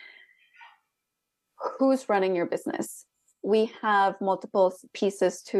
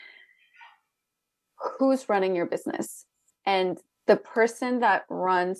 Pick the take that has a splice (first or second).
second